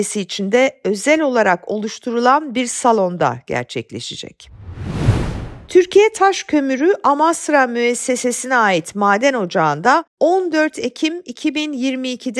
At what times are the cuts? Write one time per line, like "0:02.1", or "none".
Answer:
0:05.7